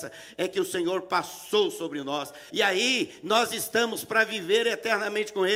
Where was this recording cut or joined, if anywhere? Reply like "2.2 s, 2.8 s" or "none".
2.5 s